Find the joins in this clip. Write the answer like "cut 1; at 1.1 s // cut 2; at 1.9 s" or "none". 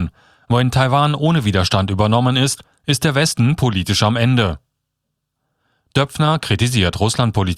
none